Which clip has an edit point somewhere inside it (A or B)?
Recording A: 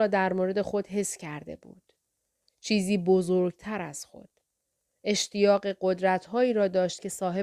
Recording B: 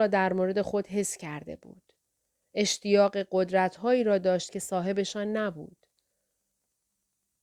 B